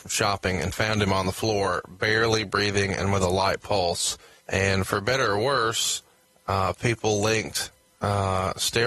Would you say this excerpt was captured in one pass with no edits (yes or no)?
no